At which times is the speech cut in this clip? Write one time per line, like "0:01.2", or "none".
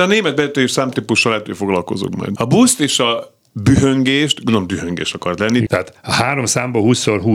0:02.4
0:05.7

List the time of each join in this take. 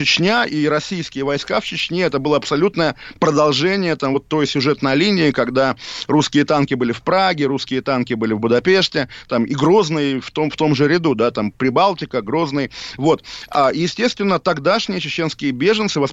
none

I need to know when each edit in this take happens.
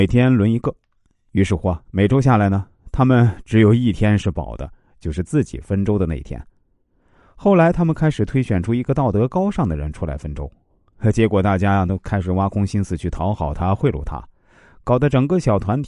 none

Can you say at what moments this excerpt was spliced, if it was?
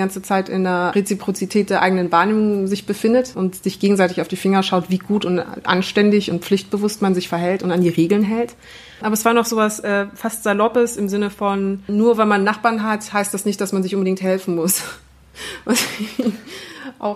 none

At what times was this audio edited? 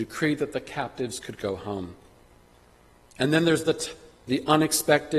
none

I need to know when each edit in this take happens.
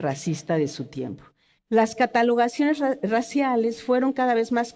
0:01.6

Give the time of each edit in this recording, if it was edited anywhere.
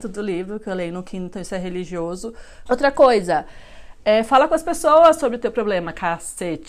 0:02.7

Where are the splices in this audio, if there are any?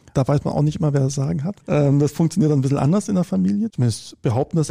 0:01.6
0:03.7

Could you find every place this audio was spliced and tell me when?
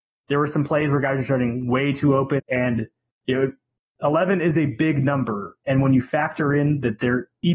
0:02.4

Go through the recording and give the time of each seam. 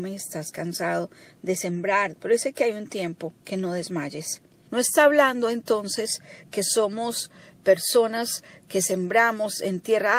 0:02.1
0:03.4
0:04.7

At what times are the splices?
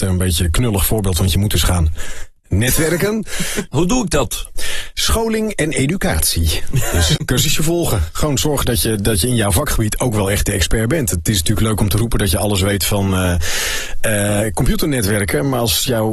0:03.7
0:07.2

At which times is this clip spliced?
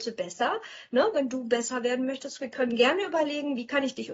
none

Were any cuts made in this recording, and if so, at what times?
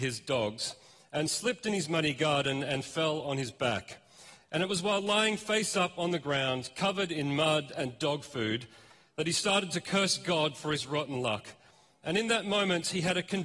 none

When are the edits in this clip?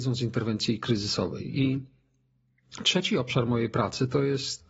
none

